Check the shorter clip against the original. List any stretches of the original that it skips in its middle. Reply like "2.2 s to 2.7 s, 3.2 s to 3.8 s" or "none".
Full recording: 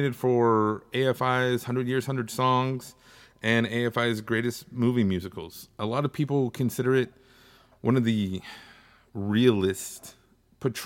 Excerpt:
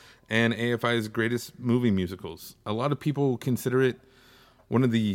none